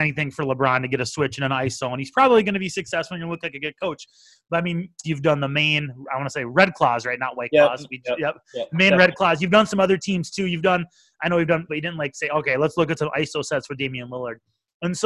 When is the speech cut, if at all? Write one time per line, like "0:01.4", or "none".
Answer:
0:05.0
0:11.7

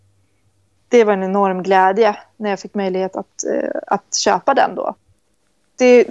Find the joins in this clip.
none

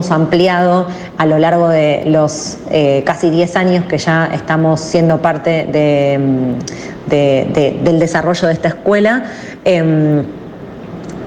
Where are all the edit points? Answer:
none

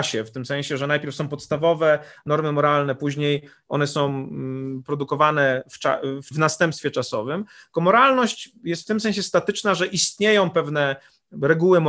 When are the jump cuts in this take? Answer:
0:06.3

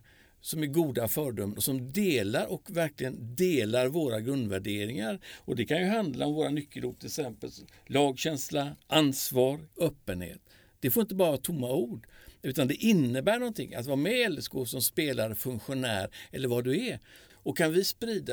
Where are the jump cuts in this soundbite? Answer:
0:09.7
0:17.3

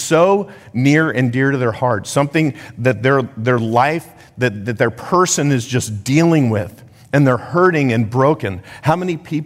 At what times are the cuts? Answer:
none

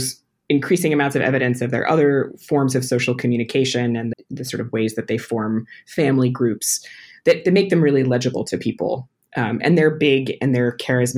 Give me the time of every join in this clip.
0:04.1

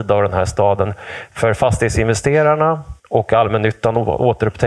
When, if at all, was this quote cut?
0:03.0

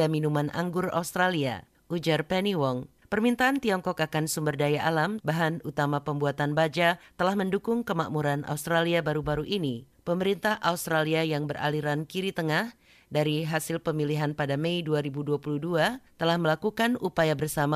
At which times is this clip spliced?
0:03.0
0:05.2

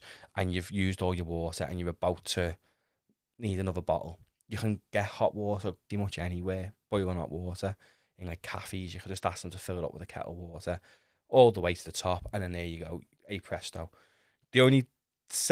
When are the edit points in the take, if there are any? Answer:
0:05.9

